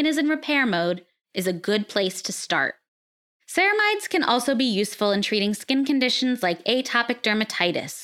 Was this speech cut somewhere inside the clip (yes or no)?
no